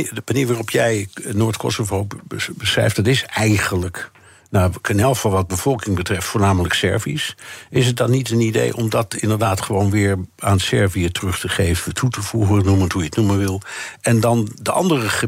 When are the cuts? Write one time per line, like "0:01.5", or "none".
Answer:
none